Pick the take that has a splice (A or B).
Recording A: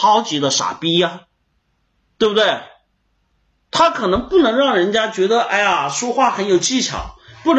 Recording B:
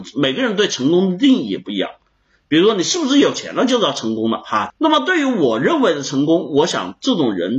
B